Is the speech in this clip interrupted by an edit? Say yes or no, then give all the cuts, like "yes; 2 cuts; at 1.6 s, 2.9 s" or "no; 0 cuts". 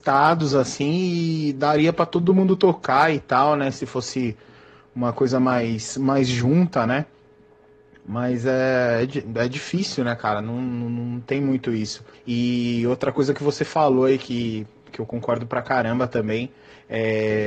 yes; 1 cut; at 12.1 s